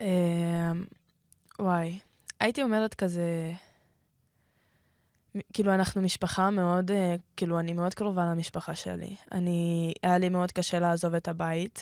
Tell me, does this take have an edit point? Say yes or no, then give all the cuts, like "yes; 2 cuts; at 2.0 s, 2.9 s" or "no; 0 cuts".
no; 0 cuts